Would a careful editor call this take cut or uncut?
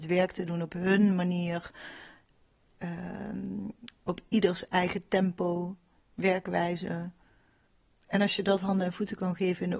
uncut